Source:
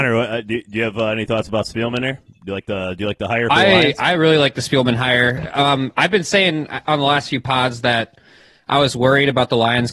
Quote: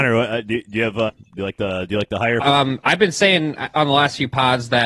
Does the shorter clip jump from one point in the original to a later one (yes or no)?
yes